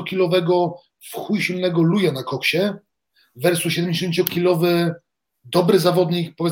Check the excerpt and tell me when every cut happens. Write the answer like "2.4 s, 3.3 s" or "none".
none